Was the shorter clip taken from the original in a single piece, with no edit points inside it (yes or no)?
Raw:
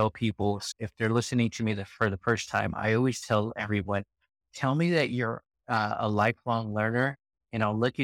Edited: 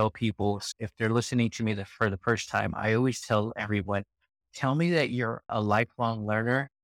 no